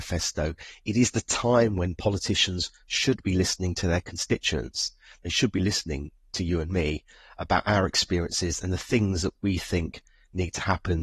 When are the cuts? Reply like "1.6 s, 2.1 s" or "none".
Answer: none